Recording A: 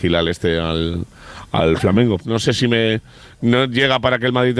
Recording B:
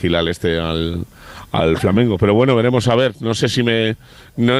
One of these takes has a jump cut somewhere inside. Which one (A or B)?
A